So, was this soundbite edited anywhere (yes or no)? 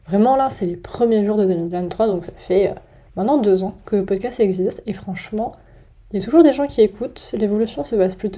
no